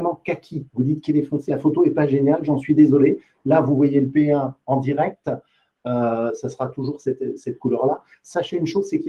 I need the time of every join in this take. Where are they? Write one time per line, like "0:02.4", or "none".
0:01.5